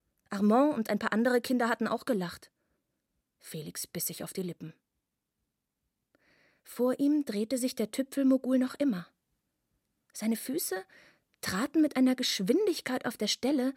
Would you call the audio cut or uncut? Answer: uncut